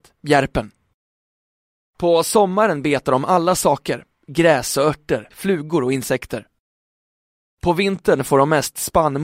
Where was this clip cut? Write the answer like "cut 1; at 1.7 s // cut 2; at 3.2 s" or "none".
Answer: cut 1; at 1.9 s // cut 2; at 5.3 s